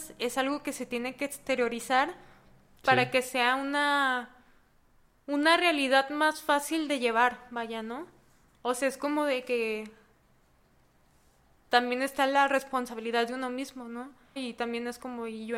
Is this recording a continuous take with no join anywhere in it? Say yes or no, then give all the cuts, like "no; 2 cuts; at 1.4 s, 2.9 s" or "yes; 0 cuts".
no; 1 cut; at 14.4 s